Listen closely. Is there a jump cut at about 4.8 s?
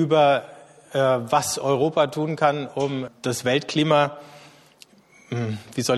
no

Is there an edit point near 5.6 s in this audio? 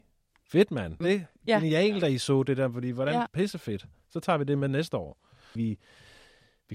yes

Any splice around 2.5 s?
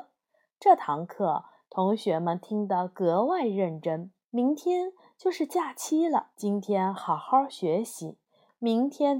no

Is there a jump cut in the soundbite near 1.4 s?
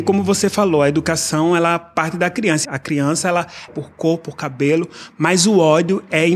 no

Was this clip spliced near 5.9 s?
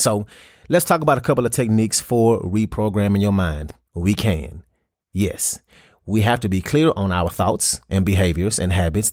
no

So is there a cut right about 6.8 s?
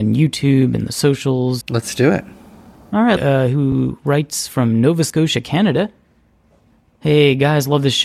no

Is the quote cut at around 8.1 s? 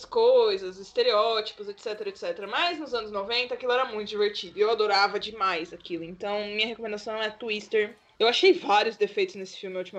yes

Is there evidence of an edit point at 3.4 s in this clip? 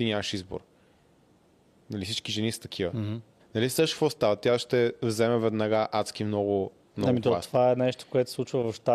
yes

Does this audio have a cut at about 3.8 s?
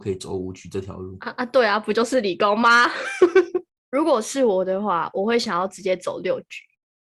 yes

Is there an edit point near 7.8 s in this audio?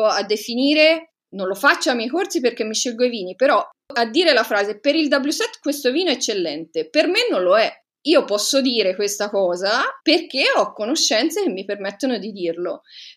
no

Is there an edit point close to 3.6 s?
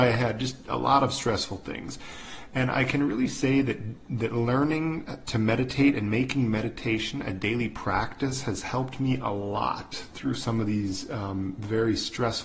no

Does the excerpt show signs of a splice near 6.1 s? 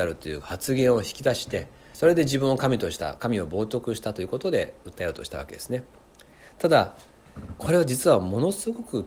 no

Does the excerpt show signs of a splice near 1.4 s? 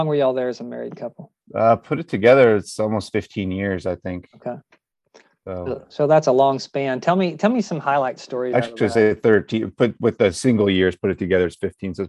yes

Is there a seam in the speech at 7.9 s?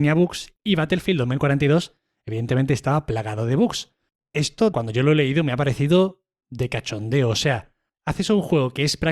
no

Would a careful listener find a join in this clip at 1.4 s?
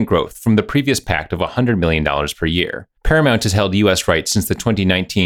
no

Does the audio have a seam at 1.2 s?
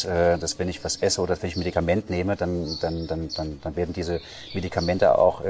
no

